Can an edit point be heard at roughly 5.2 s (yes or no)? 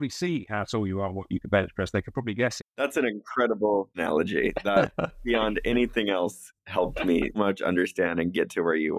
no